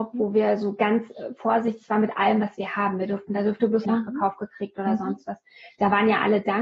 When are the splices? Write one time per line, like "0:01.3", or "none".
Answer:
0:03.9